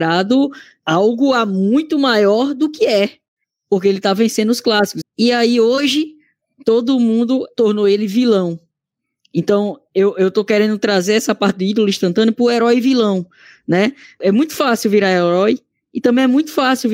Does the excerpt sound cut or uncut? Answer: cut